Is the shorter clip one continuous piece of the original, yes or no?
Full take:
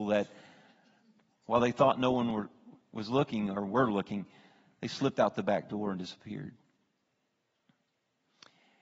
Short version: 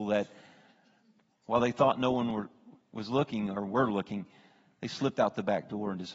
yes